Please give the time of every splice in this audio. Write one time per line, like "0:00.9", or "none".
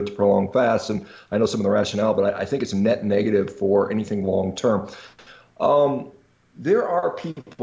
none